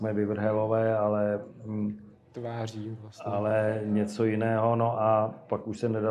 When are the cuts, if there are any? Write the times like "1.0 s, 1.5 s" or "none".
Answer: none